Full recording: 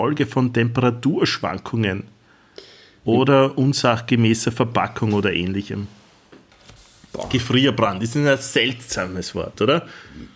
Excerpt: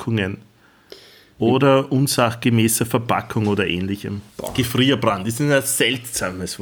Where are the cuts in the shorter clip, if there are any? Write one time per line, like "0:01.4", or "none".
0:04.3